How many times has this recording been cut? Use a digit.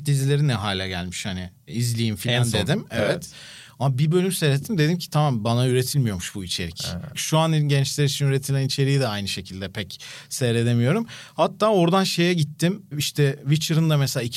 1